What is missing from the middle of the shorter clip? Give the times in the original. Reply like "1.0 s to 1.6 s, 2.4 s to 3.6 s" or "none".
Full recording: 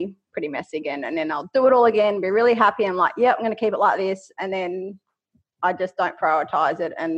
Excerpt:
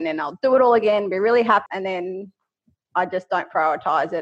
2.8 s to 4.3 s